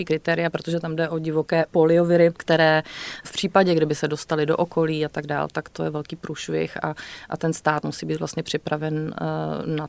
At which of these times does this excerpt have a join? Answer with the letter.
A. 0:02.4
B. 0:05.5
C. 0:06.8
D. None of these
D